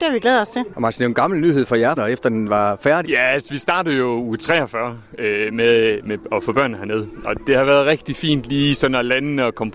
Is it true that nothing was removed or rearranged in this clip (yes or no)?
no